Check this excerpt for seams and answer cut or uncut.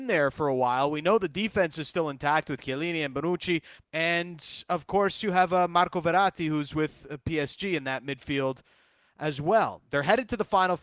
cut